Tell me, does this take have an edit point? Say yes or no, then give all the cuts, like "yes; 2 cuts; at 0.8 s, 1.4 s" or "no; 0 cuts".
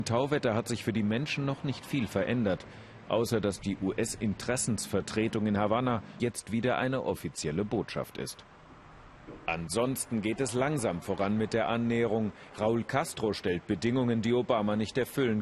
yes; 1 cut; at 6.2 s